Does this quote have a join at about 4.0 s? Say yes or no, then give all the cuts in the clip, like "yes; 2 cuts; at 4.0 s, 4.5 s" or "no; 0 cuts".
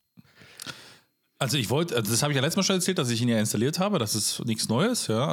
no; 0 cuts